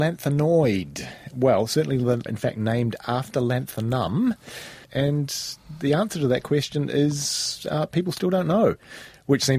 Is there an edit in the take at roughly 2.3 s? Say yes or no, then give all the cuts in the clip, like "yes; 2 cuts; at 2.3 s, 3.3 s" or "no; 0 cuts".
yes; 2 cuts; at 2.3 s, 4.8 s